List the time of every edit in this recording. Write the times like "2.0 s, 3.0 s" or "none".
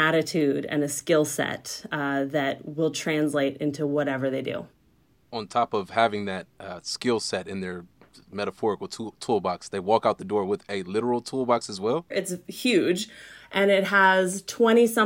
12.1 s